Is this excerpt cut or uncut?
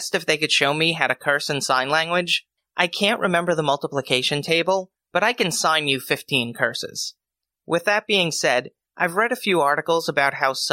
uncut